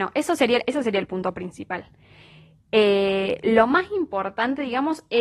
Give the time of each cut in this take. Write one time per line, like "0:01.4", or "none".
none